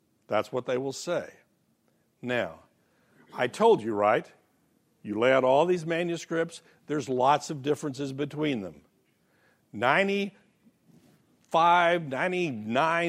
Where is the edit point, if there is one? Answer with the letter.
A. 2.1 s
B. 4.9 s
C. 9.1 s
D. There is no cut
D